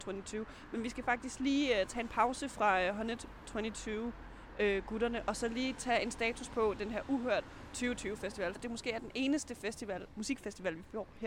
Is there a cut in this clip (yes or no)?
yes